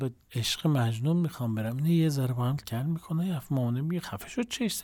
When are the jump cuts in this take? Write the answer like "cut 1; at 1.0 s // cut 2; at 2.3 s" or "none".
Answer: cut 1; at 2.6 s